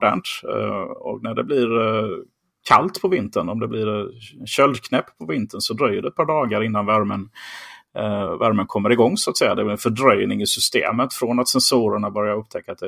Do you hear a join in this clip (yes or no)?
no